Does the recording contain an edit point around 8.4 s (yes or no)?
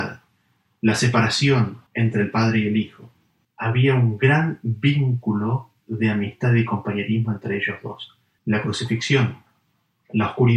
yes